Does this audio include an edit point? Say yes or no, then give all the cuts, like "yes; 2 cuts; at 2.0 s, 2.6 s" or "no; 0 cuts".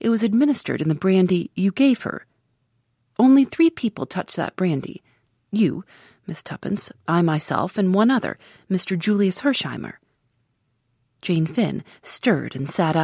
no; 0 cuts